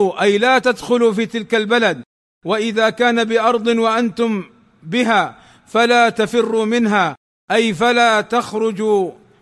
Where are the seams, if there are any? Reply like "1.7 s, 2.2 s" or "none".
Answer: none